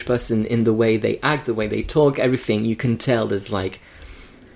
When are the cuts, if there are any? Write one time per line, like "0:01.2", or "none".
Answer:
none